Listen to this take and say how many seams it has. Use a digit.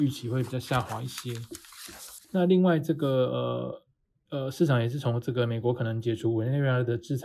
1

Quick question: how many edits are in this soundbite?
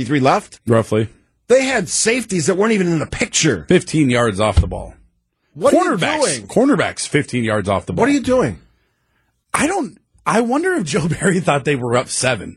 0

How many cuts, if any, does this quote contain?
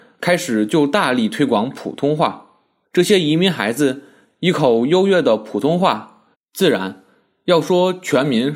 2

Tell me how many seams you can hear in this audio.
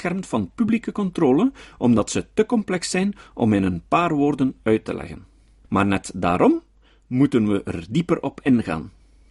1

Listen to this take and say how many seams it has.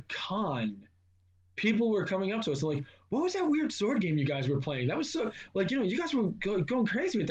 0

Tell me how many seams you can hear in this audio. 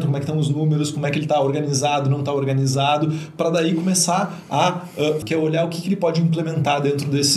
1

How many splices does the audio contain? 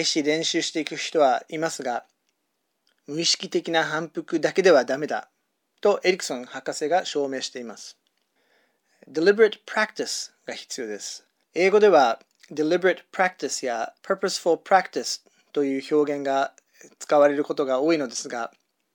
2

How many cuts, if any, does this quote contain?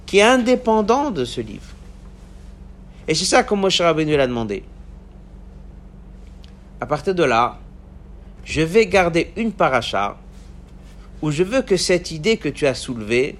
1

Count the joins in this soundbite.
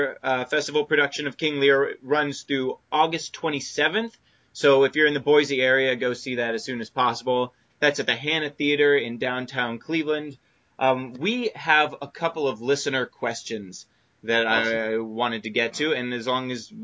1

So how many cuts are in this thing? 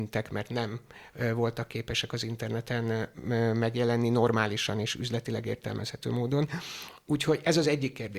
0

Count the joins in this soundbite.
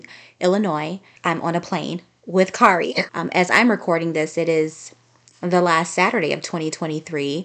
2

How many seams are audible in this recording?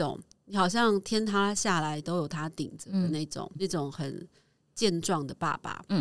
1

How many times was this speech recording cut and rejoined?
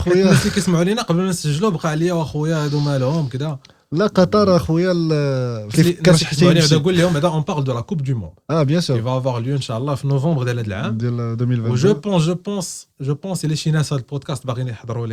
2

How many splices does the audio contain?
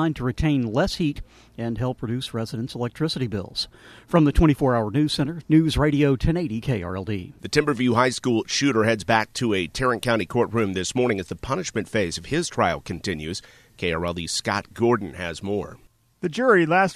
1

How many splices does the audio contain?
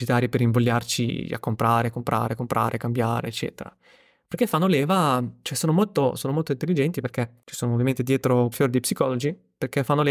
2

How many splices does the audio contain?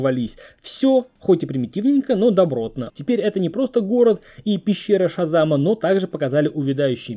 1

